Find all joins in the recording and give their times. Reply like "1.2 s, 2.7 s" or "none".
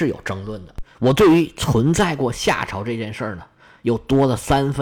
0.9 s

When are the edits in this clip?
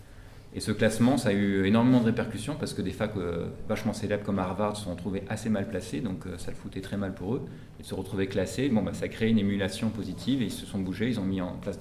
none

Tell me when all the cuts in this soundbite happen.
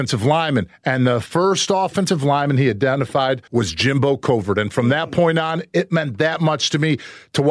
3.5 s

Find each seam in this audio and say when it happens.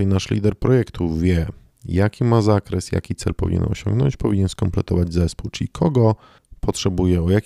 none

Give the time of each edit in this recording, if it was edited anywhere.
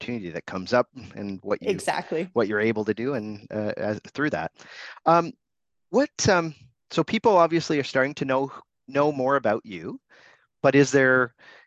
none

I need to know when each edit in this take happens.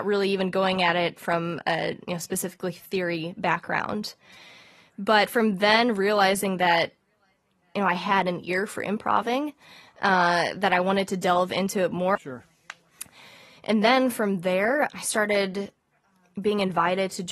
12.2 s, 14.9 s

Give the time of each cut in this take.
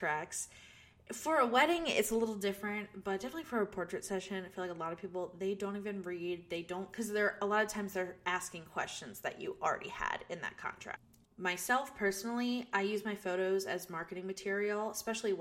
11.2 s

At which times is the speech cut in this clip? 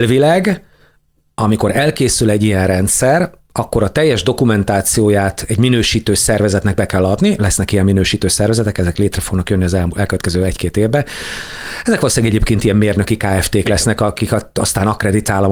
none

